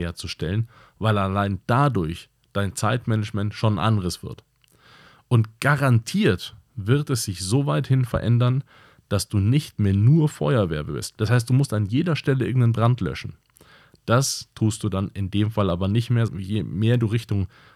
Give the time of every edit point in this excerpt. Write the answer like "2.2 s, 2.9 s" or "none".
11.2 s, 16.3 s